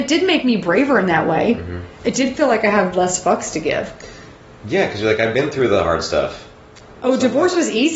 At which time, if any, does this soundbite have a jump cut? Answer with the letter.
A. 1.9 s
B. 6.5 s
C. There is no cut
C